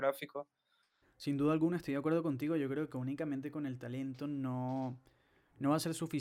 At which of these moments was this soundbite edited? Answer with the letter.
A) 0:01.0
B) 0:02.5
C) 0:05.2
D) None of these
A